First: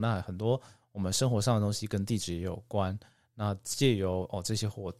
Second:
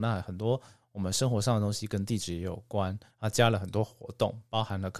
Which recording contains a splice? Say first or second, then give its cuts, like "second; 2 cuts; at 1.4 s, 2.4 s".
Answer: second; 1 cut; at 3.1 s